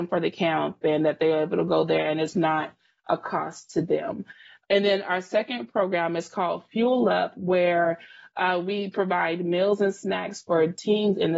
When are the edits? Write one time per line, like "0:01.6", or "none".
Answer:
none

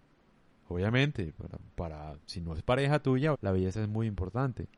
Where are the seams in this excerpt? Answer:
0:03.3

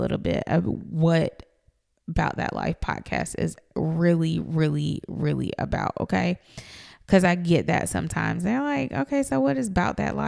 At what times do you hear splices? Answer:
none

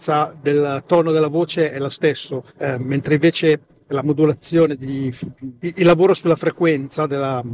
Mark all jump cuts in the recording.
0:02.5

